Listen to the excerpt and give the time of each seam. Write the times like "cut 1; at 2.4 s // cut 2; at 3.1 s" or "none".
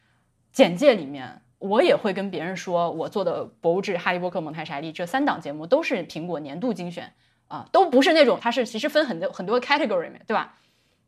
cut 1; at 8.4 s

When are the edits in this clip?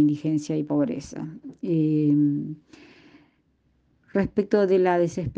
none

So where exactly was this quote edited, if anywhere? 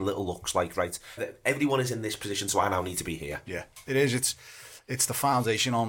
cut 1; at 1.2 s

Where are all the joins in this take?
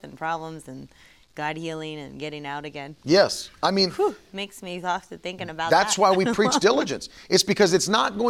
none

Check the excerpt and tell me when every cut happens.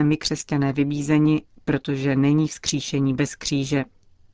none

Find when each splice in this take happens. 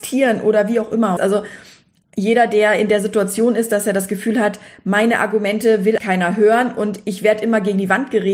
cut 1; at 1.2 s // cut 2; at 6.0 s

